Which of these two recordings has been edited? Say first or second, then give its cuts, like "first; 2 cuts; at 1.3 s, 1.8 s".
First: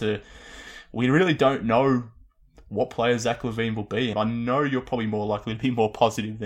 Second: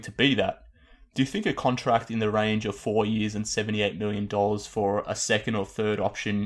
first; 1 cut; at 4.1 s